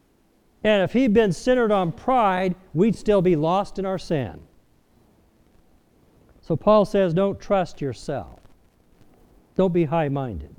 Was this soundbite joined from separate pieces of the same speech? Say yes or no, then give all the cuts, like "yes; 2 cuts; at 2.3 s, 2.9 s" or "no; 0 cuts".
no; 0 cuts